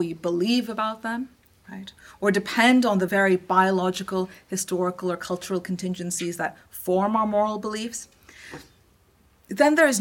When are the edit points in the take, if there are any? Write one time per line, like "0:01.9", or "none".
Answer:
none